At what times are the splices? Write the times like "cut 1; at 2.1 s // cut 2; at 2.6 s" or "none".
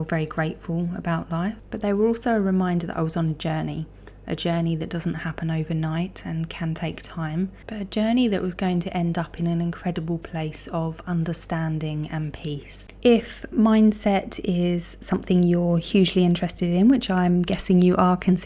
cut 1; at 13.0 s